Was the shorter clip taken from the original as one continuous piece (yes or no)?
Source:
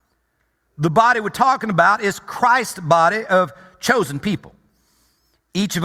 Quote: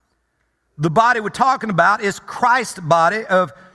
yes